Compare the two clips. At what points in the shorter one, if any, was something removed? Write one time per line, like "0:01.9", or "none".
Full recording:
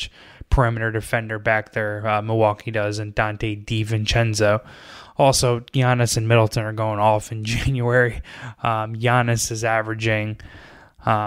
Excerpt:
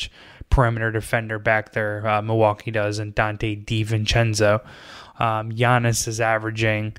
0:05.1